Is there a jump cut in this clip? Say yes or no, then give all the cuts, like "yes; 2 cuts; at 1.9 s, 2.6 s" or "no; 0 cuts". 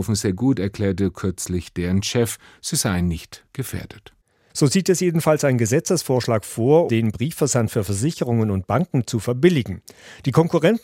yes; 2 cuts; at 4.5 s, 6.9 s